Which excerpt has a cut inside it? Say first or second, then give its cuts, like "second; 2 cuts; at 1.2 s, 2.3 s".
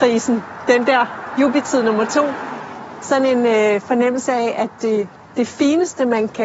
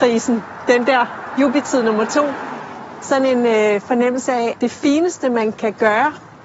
second; 1 cut; at 4.5 s